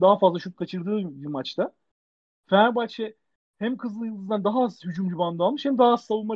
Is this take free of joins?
yes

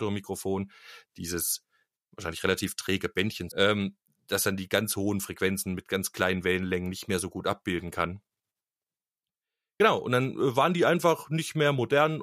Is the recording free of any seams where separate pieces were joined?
no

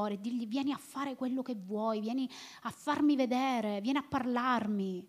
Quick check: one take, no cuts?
yes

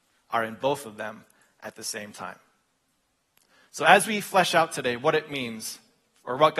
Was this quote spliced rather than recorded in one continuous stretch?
no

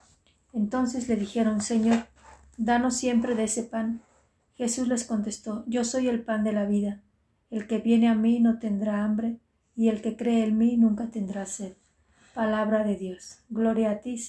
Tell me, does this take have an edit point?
no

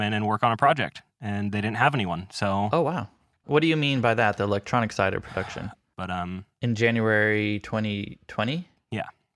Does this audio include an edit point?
yes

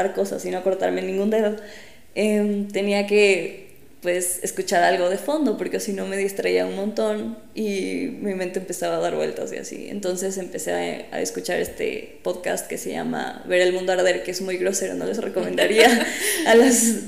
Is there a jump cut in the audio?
no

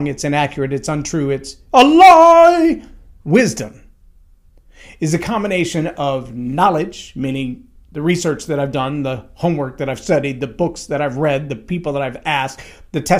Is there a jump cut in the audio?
yes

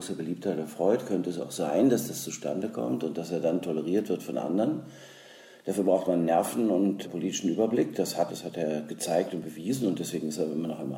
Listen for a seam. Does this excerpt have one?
yes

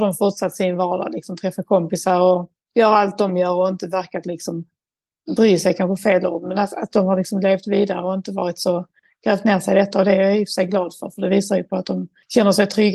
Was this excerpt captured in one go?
yes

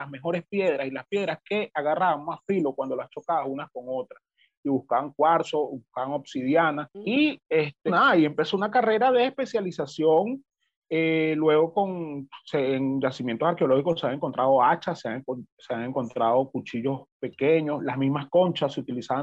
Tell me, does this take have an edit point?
yes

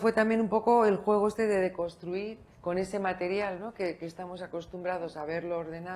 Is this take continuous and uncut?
no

